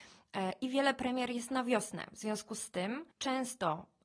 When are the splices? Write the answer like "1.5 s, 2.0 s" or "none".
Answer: 3.1 s

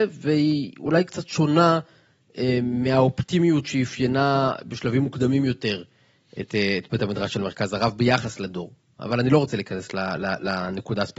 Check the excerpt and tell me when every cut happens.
none

